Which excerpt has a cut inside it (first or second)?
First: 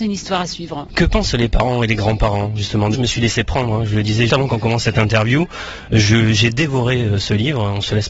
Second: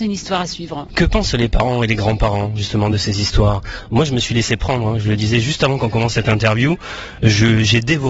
first